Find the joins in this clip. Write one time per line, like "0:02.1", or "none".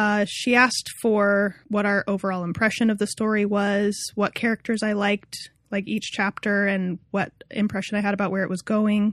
none